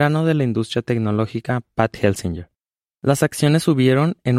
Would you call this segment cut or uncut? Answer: uncut